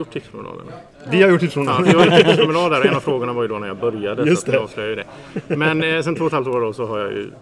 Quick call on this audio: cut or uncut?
uncut